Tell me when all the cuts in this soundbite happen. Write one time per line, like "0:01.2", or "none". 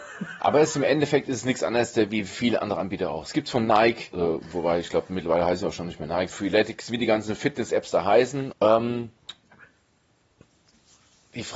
0:04.1
0:06.3
0:08.5

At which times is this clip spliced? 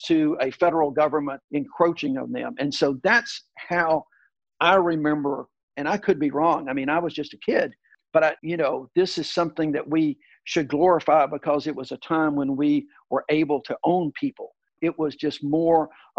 0:08.4
0:14.8

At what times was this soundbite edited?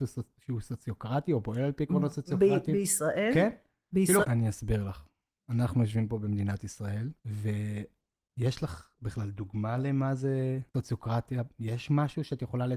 0:04.2
0:07.2
0:10.7

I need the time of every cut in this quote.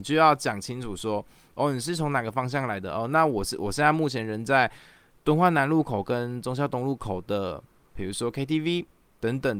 none

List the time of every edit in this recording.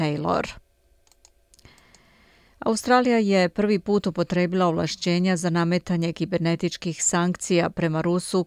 none

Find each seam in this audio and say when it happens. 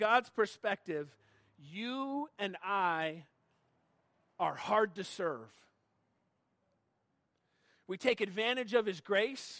none

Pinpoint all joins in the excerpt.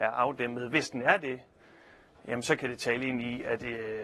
none

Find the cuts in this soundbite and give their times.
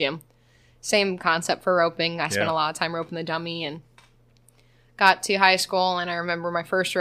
none

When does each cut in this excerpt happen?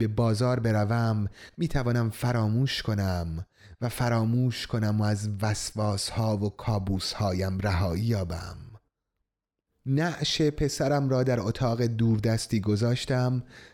none

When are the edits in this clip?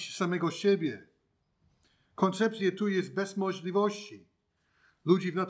none

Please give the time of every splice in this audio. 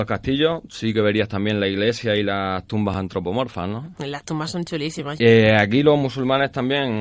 0:05.2

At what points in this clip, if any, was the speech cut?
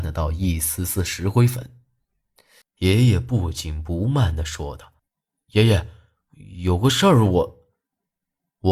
0:02.6
0:05.0

